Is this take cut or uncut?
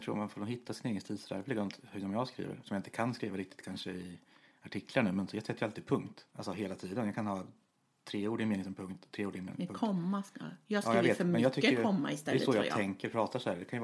cut